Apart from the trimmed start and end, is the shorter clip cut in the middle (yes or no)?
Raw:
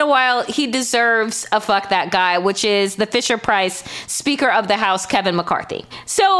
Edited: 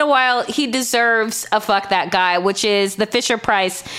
no